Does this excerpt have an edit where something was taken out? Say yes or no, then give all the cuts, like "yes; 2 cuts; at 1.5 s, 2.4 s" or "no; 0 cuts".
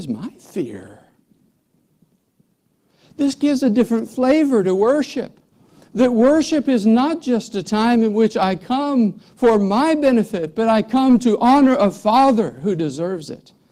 no; 0 cuts